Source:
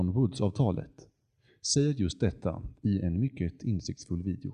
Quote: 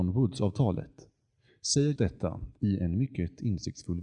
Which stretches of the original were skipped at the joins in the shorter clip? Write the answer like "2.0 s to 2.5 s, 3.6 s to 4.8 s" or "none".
2.0 s to 2.2 s